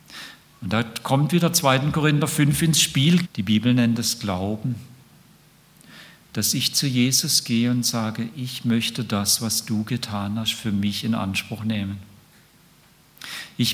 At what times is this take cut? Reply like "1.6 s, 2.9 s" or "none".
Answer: 3.2 s